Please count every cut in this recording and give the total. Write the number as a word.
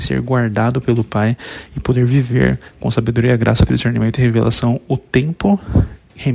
one